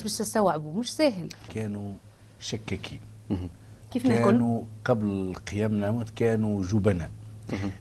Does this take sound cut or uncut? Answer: cut